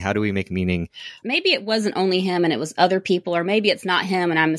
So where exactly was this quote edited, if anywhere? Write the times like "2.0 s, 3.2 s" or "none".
1.2 s